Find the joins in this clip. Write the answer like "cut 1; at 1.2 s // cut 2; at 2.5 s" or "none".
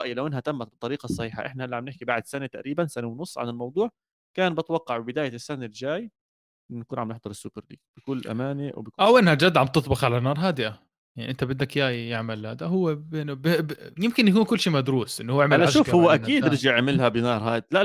none